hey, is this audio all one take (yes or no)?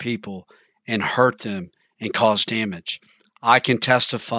yes